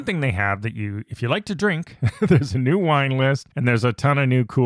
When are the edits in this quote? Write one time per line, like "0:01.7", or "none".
0:03.5